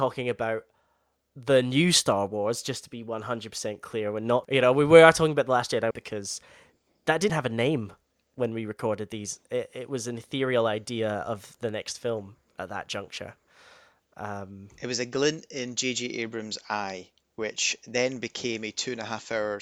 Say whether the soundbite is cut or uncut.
cut